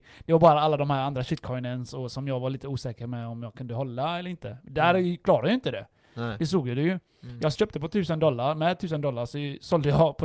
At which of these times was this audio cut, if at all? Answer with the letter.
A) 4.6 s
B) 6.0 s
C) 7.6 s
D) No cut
C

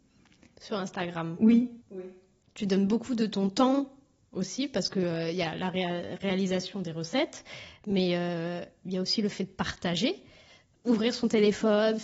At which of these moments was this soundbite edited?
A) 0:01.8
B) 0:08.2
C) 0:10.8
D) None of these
A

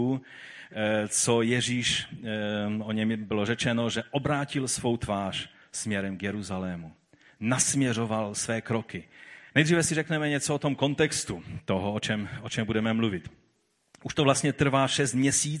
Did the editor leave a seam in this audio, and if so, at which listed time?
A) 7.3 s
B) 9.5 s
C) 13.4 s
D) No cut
B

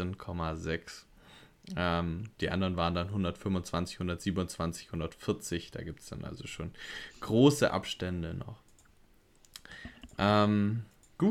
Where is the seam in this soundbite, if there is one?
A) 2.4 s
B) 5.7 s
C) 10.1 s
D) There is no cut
A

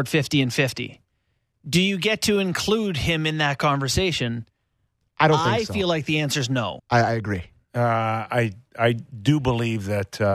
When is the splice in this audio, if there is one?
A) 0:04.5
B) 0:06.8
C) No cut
B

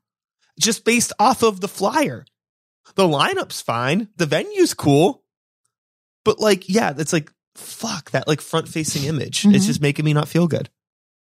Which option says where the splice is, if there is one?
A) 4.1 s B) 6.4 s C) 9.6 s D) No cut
D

